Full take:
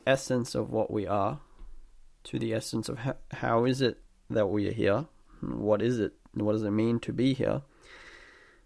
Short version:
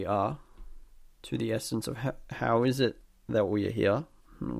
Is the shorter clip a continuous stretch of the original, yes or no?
yes